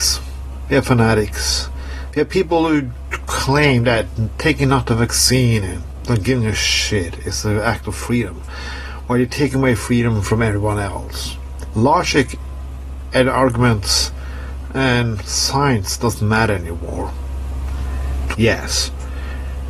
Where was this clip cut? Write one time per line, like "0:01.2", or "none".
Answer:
0:11.7
0:18.3